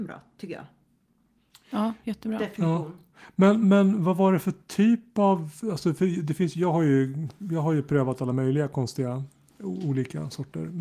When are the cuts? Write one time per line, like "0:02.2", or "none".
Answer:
0:03.6